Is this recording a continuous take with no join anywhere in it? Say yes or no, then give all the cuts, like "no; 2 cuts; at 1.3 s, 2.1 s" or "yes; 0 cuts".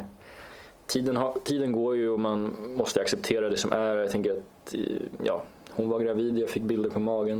yes; 0 cuts